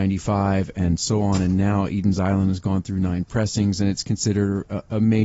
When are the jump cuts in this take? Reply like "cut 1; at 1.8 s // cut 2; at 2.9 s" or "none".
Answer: none

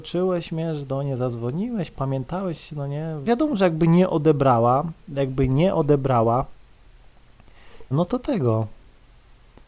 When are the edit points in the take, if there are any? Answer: cut 1; at 3.2 s // cut 2; at 7.9 s

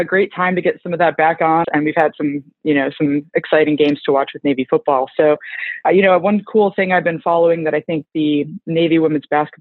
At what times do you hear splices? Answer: cut 1; at 1.6 s // cut 2; at 5.8 s

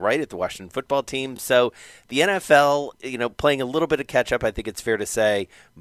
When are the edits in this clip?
none

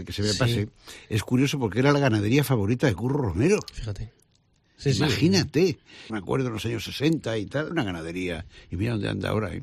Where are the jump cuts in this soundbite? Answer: cut 1; at 6.1 s // cut 2; at 7.7 s

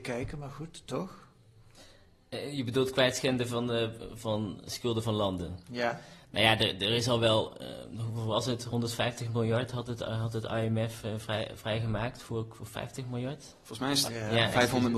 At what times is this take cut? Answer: cut 1; at 14.0 s

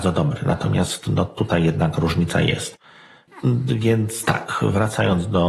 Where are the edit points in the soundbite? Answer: none

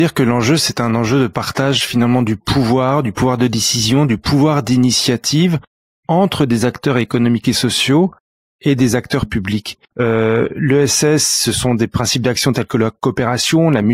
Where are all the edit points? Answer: cut 1; at 9.9 s

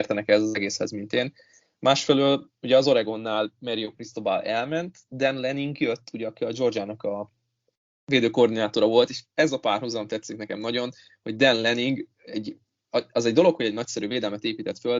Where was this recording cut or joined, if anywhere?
none

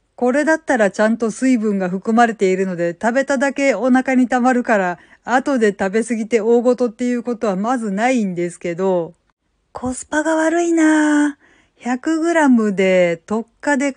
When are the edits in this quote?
none

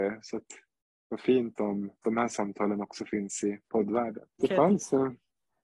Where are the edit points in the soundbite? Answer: cut 1; at 4.4 s

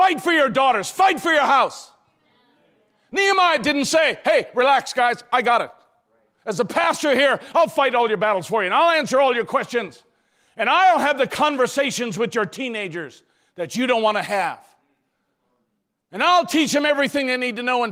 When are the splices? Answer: none

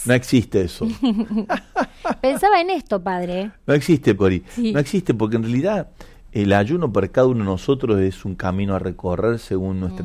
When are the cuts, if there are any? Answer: cut 1; at 4.2 s

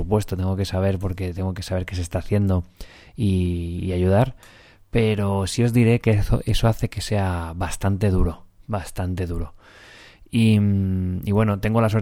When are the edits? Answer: none

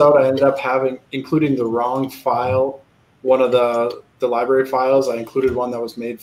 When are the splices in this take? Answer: cut 1; at 1.0 s

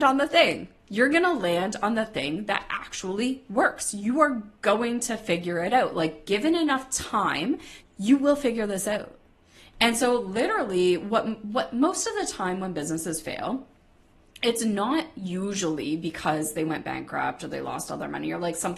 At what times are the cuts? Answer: cut 1; at 7.8 s

